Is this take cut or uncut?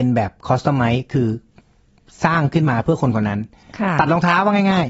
uncut